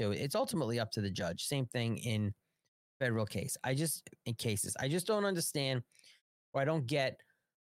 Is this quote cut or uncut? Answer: uncut